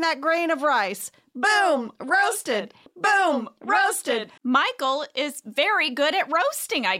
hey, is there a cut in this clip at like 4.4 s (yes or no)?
yes